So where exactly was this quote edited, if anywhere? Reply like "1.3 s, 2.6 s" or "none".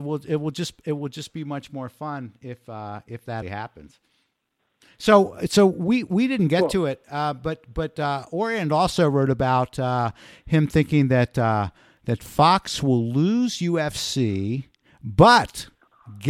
3.4 s

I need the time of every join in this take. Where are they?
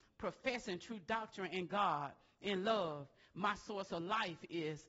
none

